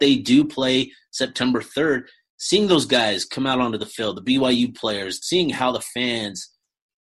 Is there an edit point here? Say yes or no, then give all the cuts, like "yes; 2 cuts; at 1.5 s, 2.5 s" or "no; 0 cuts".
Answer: yes; 1 cut; at 5.2 s